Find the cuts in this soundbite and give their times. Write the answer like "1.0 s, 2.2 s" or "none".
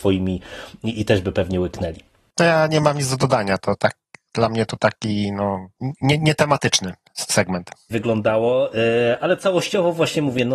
5.8 s, 7.9 s, 9.2 s